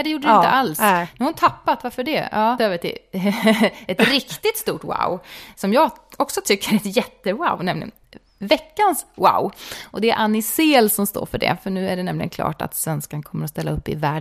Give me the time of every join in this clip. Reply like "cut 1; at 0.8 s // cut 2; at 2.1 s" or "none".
cut 1; at 2.6 s